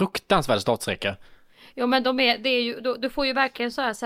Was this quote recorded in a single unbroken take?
yes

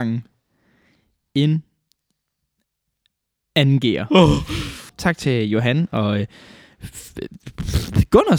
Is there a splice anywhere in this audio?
yes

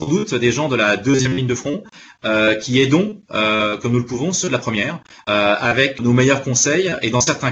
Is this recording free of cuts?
no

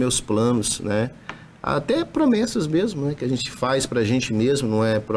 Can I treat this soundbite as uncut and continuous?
yes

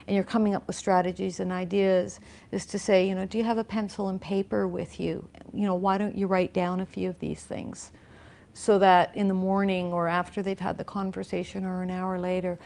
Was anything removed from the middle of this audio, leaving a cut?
no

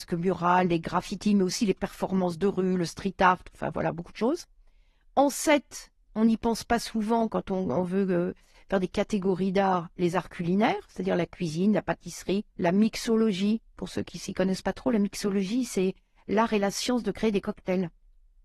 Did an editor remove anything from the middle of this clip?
yes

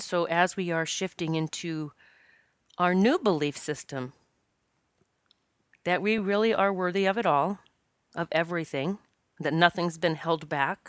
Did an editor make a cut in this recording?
no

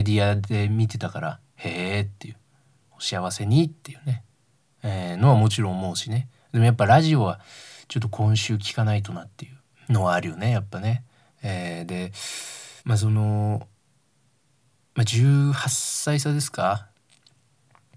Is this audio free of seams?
no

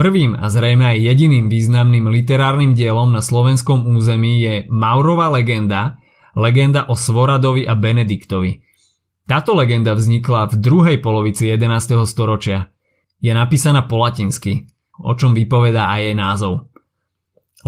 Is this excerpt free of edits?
no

